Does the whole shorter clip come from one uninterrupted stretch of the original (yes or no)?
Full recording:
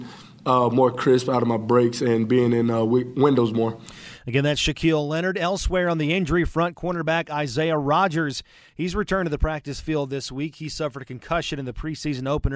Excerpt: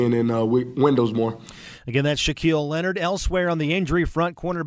yes